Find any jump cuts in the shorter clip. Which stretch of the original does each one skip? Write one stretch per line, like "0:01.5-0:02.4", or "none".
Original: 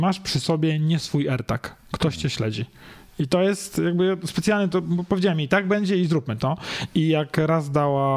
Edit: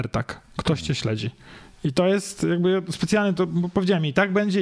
none

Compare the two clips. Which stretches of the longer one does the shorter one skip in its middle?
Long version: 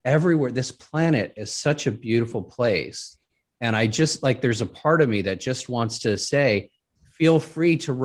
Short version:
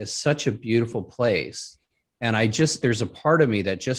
0:04.2-0:04.4

